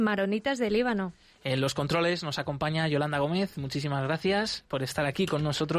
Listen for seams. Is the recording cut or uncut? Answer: uncut